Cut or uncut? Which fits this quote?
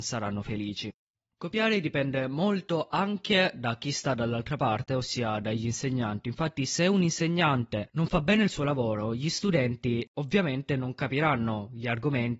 uncut